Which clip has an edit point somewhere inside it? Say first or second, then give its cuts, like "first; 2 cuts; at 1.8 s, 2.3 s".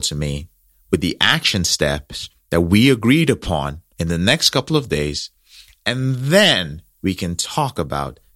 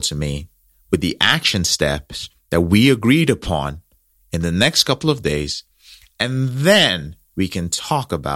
first; 1 cut; at 3.9 s